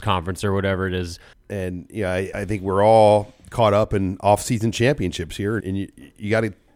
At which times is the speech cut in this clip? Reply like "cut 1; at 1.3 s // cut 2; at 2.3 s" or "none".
cut 1; at 1.3 s // cut 2; at 2.3 s // cut 3; at 5.6 s